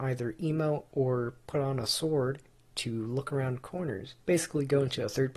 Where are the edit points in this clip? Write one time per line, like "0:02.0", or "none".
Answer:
0:04.2